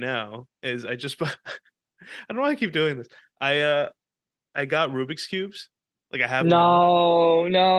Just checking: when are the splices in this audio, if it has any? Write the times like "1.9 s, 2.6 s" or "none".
none